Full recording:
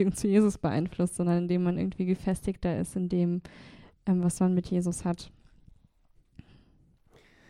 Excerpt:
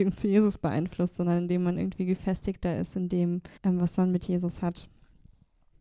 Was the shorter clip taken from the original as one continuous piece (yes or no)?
no